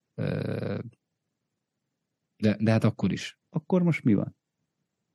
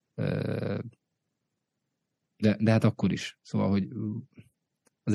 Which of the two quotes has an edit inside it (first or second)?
first